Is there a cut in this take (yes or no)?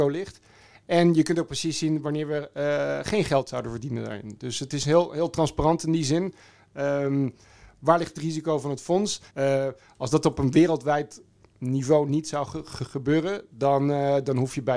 yes